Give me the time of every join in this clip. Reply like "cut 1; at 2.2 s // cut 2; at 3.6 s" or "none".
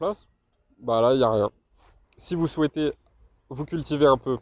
cut 1; at 2.0 s